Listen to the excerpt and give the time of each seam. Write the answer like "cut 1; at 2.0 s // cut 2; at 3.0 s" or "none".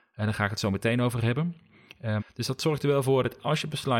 cut 1; at 2.2 s